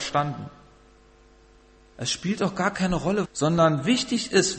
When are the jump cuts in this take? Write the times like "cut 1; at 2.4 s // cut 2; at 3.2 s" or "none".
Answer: cut 1; at 1.9 s // cut 2; at 3.2 s